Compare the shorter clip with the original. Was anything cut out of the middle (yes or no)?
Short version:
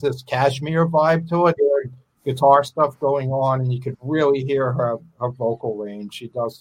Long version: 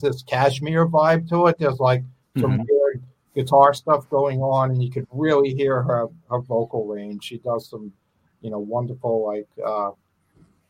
yes